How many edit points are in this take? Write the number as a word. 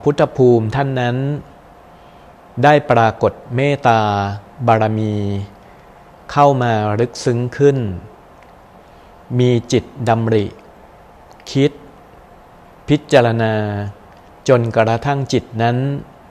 zero